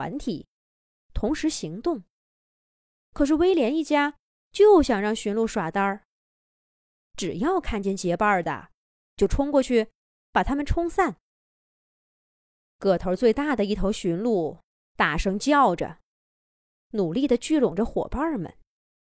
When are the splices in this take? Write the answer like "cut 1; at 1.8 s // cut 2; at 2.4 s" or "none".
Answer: cut 1; at 12.7 s